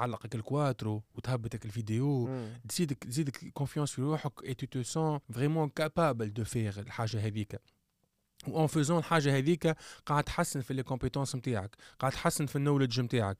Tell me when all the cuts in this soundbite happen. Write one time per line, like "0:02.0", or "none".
0:05.2